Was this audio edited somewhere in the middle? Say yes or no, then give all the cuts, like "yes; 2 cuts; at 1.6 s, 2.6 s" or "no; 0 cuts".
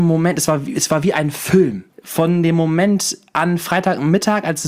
yes; 1 cut; at 1.9 s